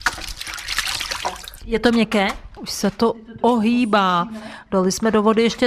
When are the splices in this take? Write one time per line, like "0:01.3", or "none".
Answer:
0:02.6